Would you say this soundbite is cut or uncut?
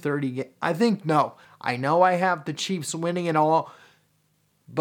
cut